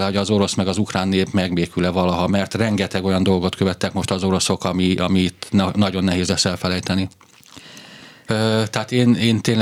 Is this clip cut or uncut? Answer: cut